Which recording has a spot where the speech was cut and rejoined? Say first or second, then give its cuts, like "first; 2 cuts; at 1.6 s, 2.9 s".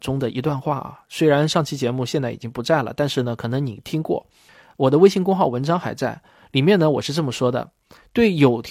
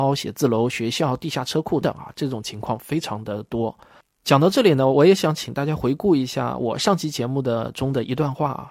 second; 1 cut; at 1.8 s